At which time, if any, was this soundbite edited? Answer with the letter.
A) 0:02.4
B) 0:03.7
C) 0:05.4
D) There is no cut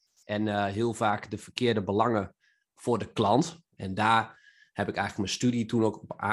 B